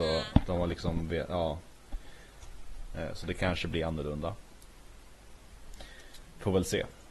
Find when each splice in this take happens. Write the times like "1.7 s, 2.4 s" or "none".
2.9 s